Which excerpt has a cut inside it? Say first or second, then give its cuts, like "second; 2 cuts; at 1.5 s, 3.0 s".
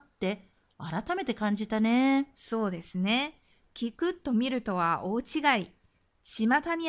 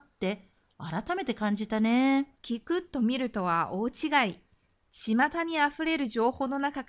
second; 1 cut; at 2.3 s